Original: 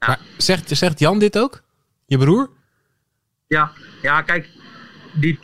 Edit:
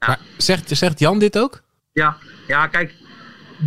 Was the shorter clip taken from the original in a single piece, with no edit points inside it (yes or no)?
no